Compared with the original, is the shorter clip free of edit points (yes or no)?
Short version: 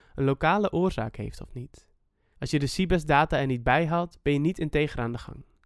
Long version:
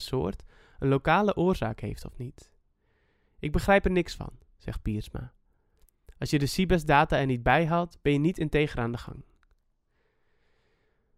no